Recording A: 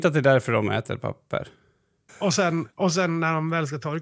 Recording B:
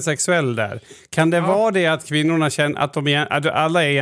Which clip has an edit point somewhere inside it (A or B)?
A